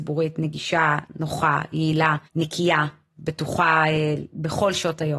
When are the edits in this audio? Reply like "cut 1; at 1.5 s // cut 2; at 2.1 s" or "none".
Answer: cut 1; at 2.3 s